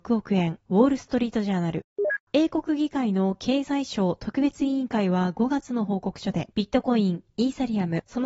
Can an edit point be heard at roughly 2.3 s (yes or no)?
yes